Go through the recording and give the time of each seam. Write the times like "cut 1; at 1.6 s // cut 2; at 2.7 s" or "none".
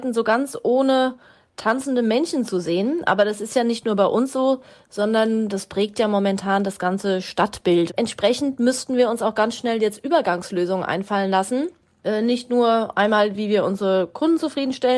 cut 1; at 7.9 s